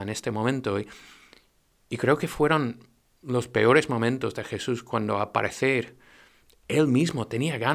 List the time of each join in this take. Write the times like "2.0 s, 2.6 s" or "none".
none